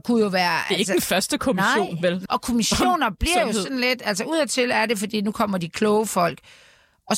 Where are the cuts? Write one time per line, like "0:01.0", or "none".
0:02.3